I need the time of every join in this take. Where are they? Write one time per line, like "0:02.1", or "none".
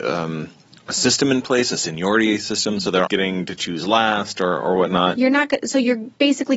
0:03.1
0:05.1